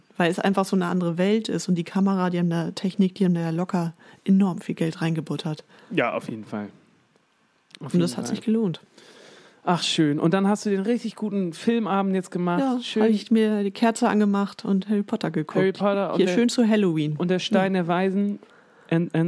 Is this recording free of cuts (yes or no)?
yes